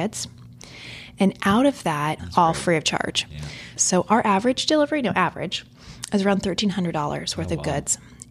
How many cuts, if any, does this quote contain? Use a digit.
2